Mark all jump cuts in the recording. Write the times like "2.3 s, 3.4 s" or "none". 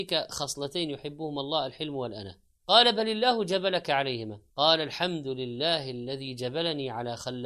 2.6 s, 4.5 s